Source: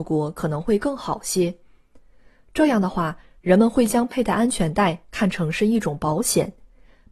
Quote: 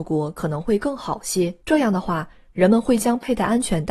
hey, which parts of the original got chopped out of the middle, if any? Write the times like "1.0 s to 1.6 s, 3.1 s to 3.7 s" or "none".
1.6 s to 2.5 s